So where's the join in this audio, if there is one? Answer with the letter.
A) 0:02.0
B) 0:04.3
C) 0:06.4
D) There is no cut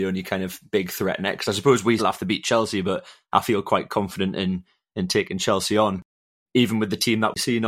A